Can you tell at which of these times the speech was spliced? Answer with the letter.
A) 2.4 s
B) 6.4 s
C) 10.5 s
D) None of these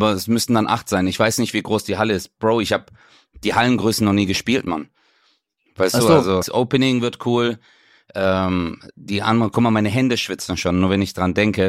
B